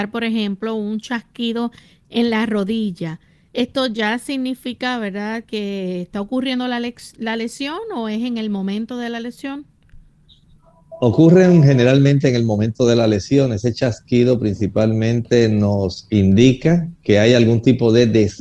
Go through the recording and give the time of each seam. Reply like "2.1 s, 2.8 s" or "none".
none